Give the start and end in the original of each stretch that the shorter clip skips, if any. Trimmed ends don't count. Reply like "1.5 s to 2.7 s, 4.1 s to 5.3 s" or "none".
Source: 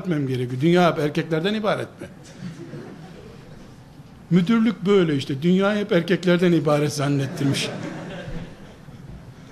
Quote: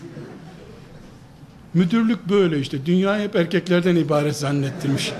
none